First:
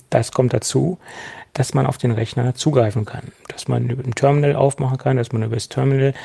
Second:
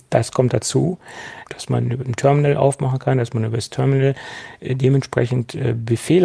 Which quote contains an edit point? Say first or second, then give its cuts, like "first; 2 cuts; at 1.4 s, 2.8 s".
second; 1 cut; at 1.5 s